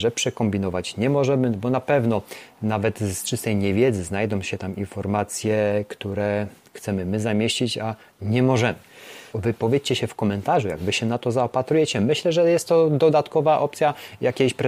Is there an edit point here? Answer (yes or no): yes